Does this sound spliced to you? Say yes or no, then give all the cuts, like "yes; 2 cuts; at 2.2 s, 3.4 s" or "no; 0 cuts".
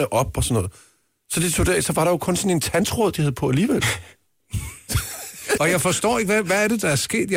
yes; 1 cut; at 5.6 s